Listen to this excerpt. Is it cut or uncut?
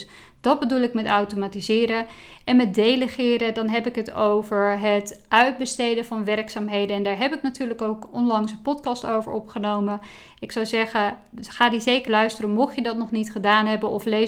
cut